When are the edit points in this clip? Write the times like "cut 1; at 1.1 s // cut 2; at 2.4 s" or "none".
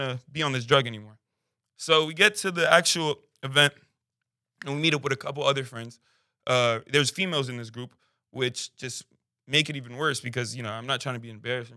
none